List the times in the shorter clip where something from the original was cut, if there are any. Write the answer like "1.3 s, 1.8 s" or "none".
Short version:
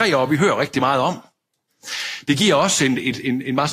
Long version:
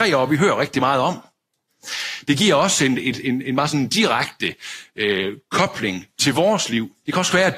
none